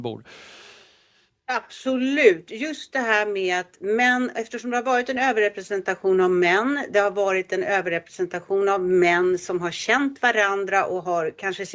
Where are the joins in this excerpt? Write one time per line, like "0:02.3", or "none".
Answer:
none

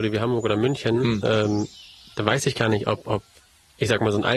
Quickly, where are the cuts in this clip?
none

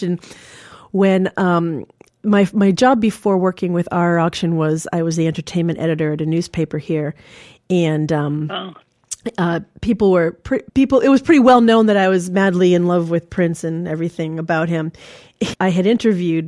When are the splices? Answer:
0:10.7
0:15.5

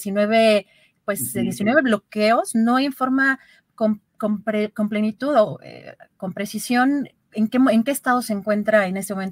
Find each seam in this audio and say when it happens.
none

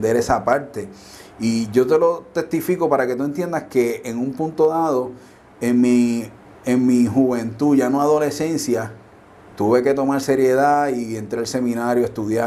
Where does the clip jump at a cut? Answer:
none

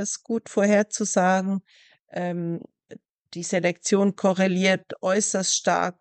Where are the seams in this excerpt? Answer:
none

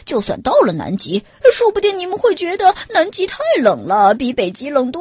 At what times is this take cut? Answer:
none

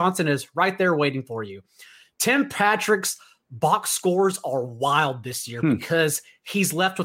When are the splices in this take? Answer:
none

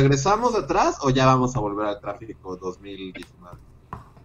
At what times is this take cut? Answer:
none

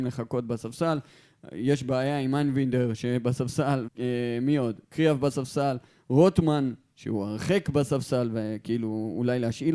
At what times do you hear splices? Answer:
0:03.9

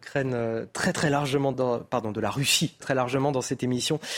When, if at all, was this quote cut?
0:01.5
0:02.8

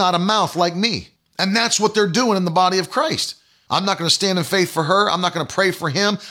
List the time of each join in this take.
0:01.2
0:03.7

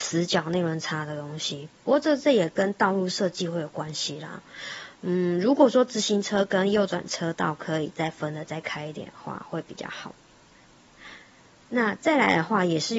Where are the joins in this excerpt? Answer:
0:01.8

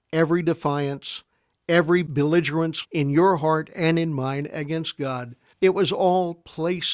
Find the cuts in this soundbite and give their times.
0:02.8
0:05.5

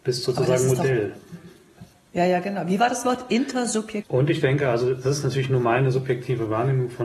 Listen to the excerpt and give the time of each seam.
0:04.0

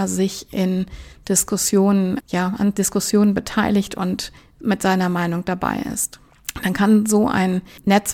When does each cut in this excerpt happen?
0:02.2

